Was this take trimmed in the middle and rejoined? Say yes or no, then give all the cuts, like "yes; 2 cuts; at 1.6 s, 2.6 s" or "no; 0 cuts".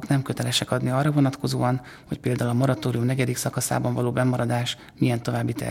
no; 0 cuts